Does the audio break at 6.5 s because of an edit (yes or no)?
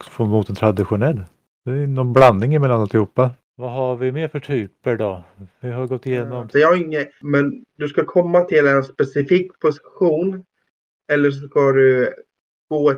yes